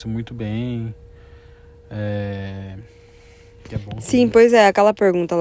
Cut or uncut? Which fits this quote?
uncut